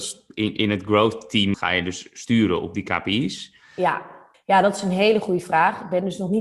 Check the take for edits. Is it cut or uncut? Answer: cut